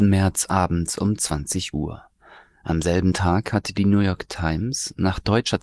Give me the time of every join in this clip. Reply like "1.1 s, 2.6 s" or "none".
none